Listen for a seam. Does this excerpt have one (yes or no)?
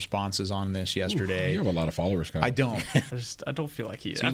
yes